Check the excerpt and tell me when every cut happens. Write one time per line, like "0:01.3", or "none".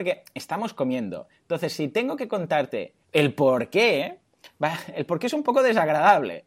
0:03.0